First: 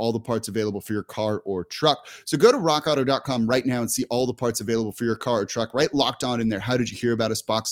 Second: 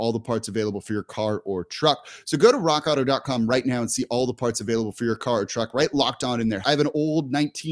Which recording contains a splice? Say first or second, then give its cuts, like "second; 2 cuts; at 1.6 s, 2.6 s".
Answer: second; 1 cut; at 6.6 s